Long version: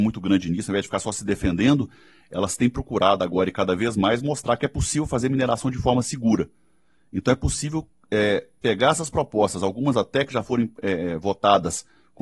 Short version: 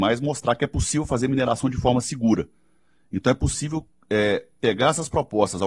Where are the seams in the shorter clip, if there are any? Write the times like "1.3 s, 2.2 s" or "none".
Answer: none

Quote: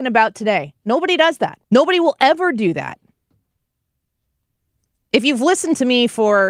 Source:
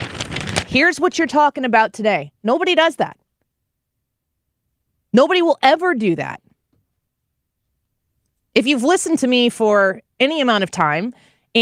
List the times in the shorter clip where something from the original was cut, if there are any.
1.6 s

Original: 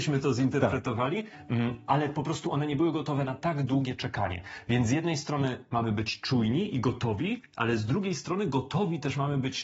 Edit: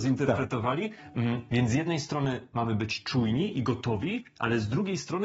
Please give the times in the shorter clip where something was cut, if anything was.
1.5 s

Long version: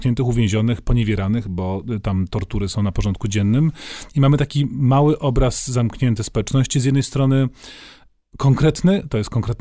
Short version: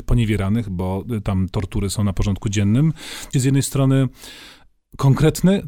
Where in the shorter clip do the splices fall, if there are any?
3.3 s

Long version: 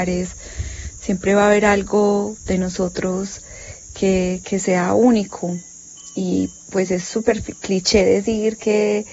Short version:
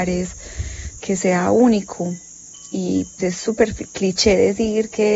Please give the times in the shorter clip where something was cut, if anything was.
1.0 s, 3.2 s

